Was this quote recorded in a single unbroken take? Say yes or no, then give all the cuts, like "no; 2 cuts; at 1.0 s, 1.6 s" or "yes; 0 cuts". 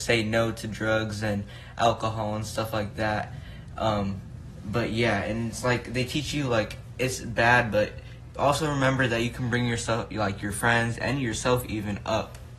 yes; 0 cuts